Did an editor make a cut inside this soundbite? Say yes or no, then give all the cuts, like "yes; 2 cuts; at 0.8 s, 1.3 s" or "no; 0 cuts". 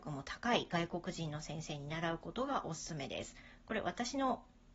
no; 0 cuts